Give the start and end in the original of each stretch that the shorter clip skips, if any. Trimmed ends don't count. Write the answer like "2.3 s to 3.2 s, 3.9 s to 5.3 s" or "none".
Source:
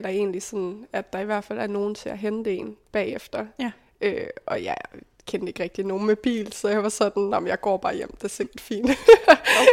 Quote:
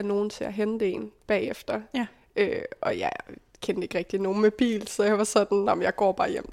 none